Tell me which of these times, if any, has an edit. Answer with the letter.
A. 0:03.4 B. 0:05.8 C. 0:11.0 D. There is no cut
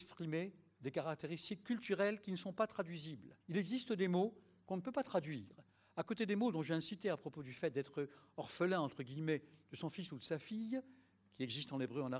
A